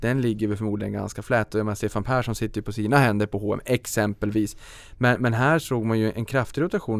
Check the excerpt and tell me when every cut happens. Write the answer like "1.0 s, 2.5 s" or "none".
none